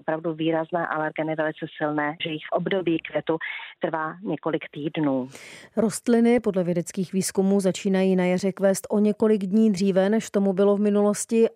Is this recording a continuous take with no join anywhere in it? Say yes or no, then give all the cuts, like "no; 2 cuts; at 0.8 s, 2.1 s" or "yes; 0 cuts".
no; 1 cut; at 2.2 s